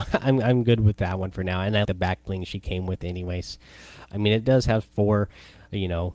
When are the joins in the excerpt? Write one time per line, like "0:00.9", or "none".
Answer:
0:01.8
0:04.1